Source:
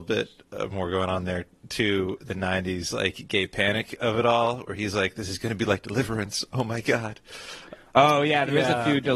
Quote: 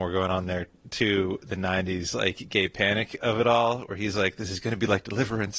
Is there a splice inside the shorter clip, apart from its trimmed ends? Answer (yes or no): no